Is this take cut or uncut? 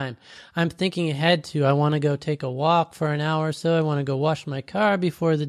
uncut